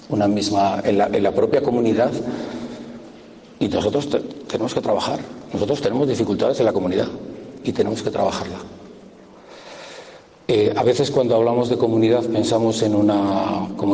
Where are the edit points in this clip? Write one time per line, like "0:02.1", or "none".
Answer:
none